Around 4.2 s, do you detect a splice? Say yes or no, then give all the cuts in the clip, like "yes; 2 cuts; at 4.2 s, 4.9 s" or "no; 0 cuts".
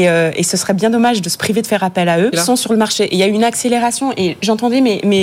no; 1 cut; at 2.3 s